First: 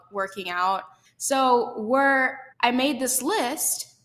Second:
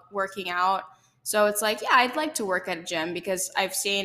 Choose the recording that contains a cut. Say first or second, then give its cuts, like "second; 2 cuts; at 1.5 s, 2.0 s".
first; 2 cuts; at 1.0 s, 2.5 s